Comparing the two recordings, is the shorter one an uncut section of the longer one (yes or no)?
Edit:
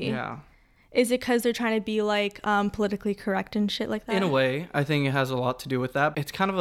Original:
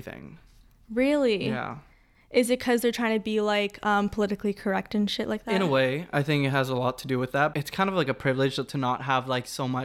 yes